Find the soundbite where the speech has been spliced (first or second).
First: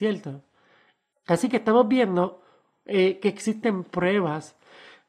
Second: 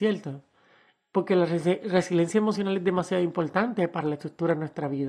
first